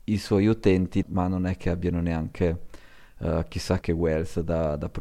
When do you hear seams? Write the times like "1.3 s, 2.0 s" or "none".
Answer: 1.0 s, 3.8 s